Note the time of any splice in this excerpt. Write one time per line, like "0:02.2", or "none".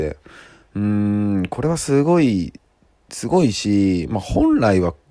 none